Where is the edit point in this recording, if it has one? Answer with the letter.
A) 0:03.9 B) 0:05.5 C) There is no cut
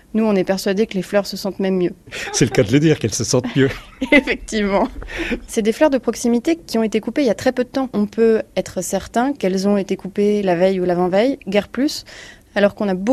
B